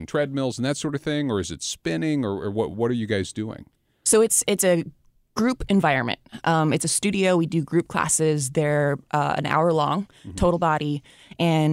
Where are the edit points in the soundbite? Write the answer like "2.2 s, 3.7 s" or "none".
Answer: none